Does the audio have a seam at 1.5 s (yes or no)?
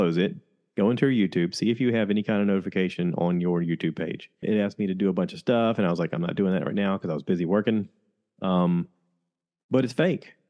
no